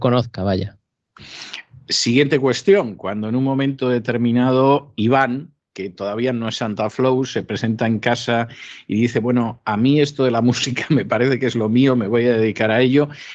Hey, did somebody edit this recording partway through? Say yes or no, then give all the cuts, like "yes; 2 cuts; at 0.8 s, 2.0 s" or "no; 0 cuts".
no; 0 cuts